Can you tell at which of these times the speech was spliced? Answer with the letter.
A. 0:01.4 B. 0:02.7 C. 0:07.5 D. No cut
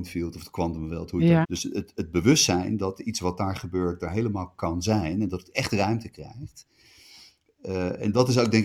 A